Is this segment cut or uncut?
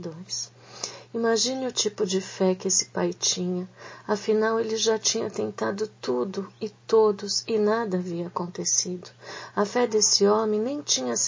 uncut